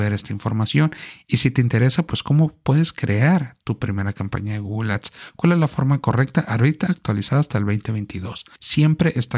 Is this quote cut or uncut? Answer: uncut